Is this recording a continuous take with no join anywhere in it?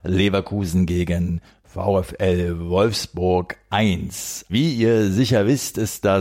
no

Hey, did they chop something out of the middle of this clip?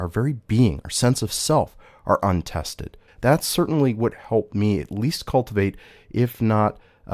yes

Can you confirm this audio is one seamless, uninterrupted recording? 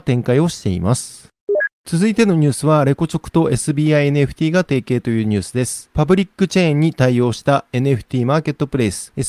yes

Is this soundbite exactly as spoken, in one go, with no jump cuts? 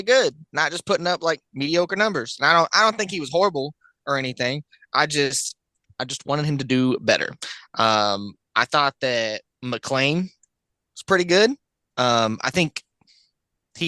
yes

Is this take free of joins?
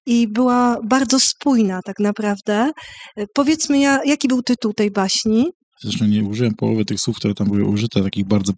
no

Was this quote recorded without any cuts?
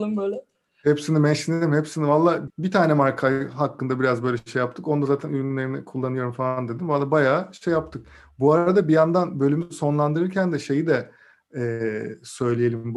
no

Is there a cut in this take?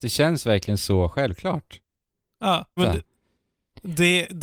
yes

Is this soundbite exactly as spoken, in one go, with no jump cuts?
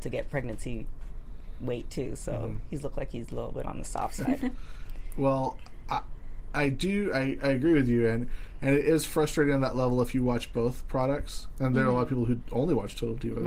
yes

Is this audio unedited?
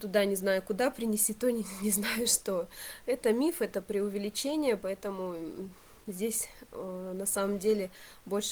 yes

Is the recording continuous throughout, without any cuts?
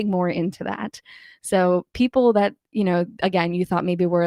yes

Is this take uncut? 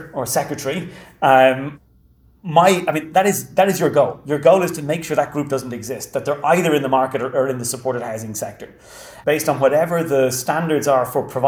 no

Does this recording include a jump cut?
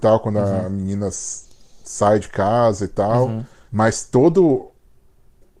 yes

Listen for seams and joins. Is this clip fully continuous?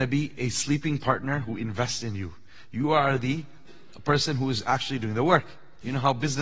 yes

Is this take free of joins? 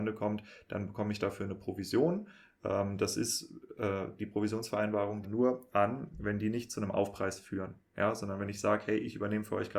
no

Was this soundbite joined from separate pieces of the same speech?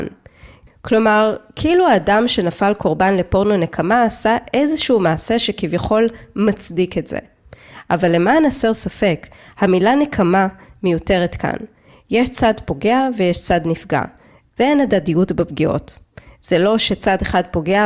no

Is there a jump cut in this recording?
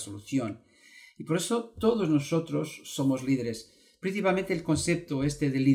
no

